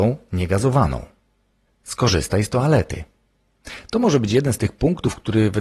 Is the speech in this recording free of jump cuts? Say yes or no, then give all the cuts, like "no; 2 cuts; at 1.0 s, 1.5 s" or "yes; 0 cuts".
yes; 0 cuts